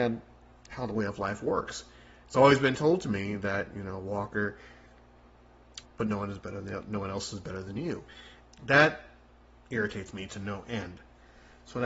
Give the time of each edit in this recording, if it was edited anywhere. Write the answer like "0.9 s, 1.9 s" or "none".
5.8 s, 8.4 s